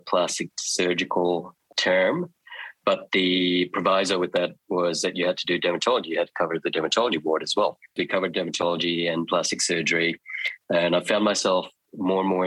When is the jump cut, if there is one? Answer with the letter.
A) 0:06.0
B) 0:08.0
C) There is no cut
B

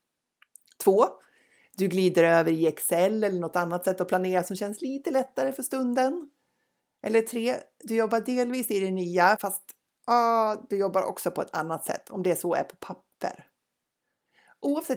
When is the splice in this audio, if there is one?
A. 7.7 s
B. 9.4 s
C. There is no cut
B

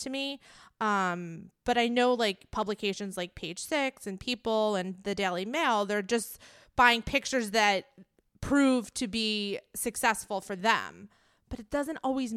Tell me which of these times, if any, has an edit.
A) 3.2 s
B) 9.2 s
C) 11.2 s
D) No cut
D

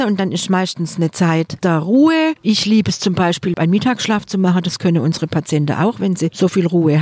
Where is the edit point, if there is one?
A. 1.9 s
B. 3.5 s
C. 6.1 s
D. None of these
B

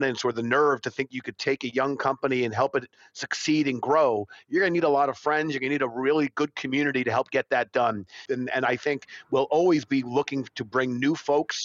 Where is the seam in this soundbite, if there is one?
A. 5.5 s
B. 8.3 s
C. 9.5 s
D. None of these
B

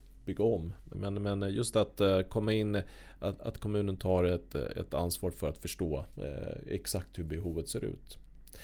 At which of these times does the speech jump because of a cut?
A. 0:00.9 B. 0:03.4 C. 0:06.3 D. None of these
A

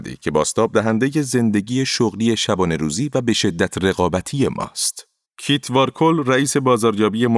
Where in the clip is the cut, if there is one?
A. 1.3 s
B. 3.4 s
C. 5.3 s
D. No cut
C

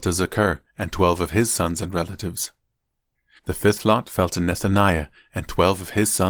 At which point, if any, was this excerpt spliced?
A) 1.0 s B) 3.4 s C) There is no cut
B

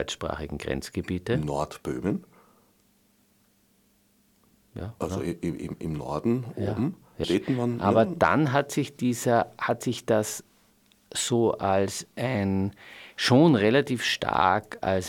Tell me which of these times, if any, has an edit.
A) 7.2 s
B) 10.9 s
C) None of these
A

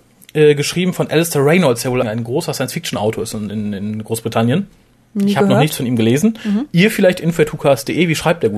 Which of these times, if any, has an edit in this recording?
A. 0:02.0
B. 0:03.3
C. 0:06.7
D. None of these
A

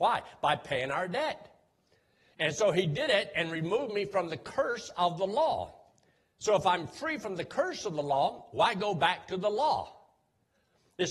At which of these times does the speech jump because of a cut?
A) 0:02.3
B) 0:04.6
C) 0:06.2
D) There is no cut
A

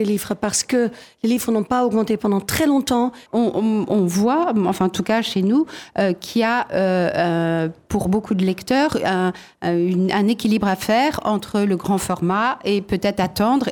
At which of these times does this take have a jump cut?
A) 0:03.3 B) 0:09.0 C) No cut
A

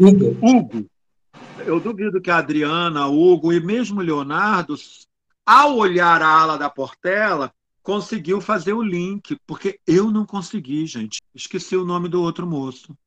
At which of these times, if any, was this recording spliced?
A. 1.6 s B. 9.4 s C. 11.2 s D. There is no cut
C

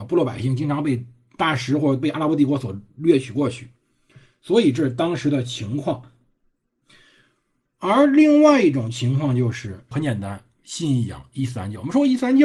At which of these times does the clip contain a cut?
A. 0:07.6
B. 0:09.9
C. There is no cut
B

